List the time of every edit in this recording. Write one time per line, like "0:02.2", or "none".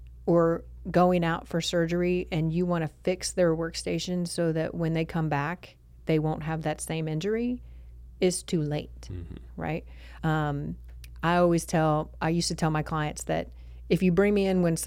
0:10.2

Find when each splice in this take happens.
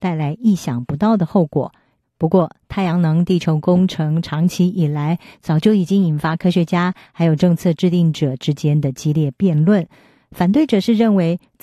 0:02.0

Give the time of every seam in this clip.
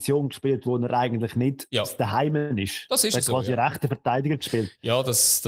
none

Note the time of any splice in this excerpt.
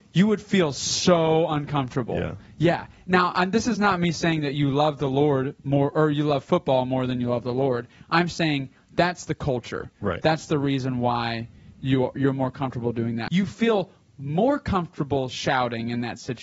0:12.2
0:13.3

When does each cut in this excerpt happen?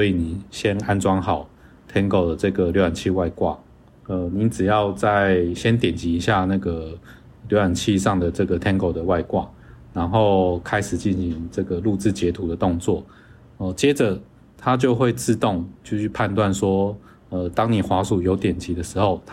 0:04.0

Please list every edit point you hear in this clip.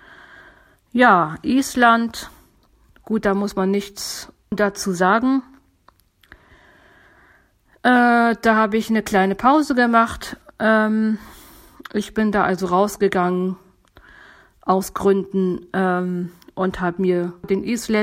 none

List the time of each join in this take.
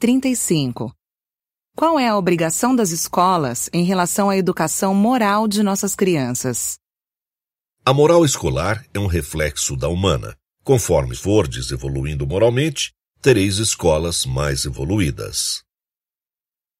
0:10.4

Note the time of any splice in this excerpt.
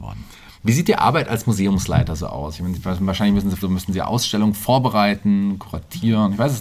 0:03.6

